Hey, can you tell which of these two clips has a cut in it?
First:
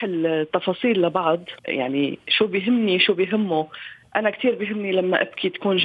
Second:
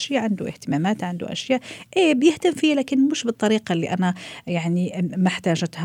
first; 1 cut; at 1.6 s

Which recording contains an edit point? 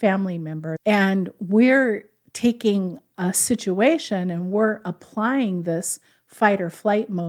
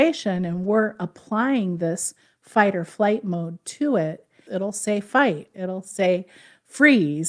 second; 2 cuts; at 4.5 s, 5.5 s

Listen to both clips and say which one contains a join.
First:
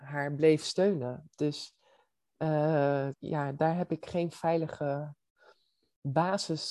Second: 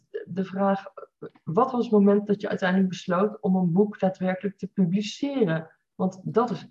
first; 1 cut; at 3.1 s

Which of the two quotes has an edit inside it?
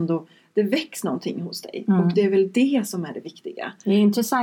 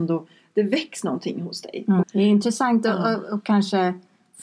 second; 1 cut; at 2.0 s

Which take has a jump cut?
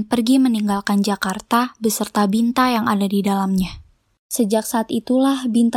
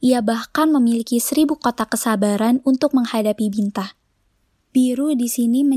second; 1 cut; at 4.6 s

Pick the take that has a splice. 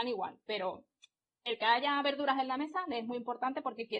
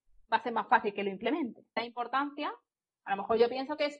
second; 1 cut; at 1.8 s

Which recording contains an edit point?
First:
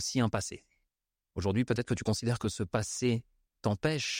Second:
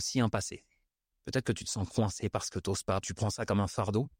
second; 2 cuts; at 1.1 s, 3.0 s

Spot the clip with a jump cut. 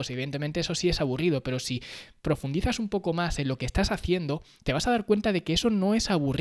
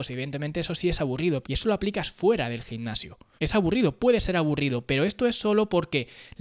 second; 2 cuts; at 1.4 s, 3.4 s

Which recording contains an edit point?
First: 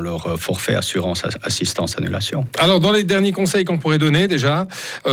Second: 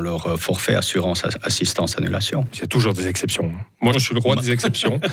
second; 2 cuts; at 2.5 s, 3.9 s

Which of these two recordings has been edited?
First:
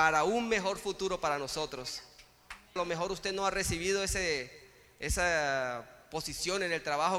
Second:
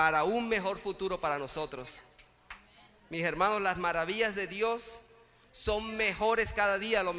first; 1 cut; at 2.8 s

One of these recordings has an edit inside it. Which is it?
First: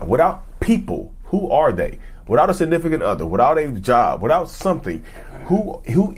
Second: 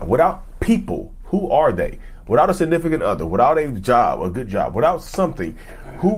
first; 1 cut; at 4.2 s

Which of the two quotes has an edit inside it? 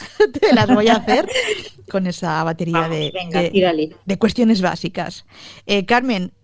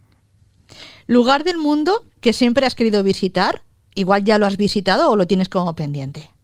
first; 1 cut; at 1.9 s

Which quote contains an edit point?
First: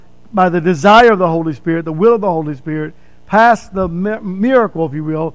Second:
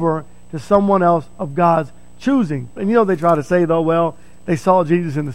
second; 1 cut; at 2.8 s

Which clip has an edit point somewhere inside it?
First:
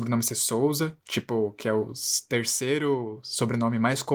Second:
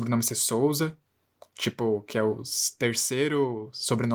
first; 1 cut; at 1.0 s

